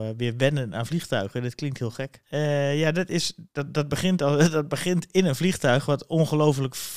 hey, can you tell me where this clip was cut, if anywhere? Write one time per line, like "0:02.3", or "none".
0:02.2